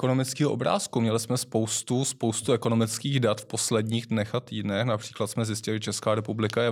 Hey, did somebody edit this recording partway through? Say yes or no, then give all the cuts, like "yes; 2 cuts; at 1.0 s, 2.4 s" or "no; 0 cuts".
no; 0 cuts